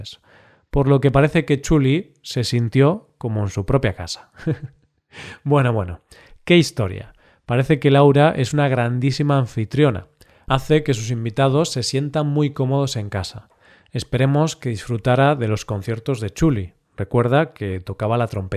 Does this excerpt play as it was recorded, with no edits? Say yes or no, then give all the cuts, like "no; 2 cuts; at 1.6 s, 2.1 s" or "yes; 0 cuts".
yes; 0 cuts